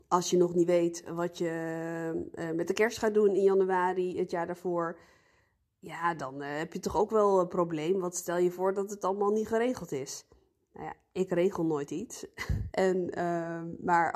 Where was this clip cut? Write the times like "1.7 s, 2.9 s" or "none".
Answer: 12.7 s